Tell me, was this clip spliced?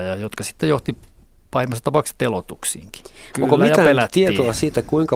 yes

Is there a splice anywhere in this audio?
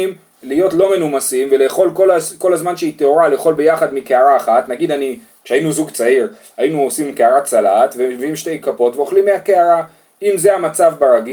no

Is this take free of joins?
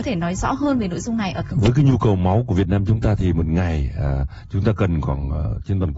yes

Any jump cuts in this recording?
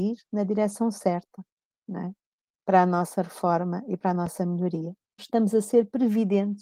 yes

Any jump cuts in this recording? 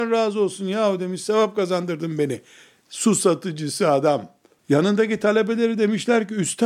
yes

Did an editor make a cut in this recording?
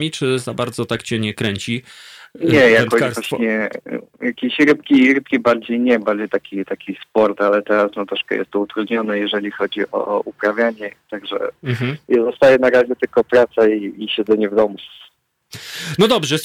no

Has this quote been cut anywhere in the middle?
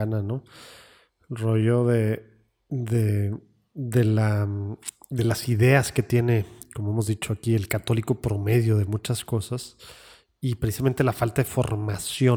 no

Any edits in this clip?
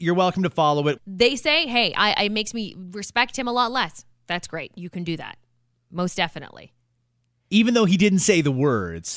yes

